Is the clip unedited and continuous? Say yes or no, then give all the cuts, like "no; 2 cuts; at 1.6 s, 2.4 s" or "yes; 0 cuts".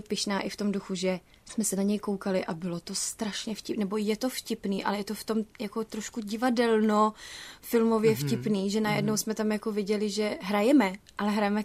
yes; 0 cuts